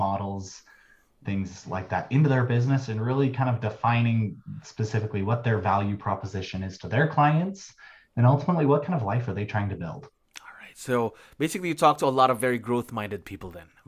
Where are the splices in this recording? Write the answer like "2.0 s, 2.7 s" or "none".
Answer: none

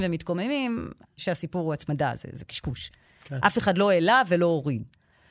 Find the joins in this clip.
1.2 s

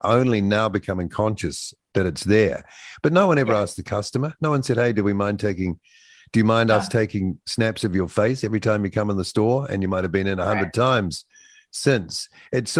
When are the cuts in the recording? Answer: none

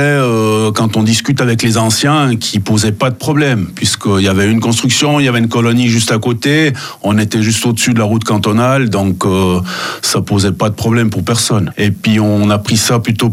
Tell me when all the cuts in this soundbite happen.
none

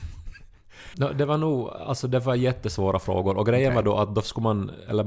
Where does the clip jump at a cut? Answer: 0.9 s

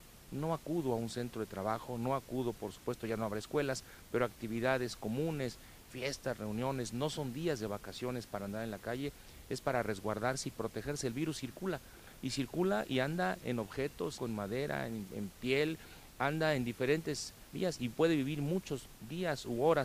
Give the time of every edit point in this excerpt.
14.2 s, 17.5 s

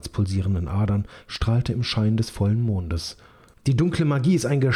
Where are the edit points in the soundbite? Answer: 3.6 s

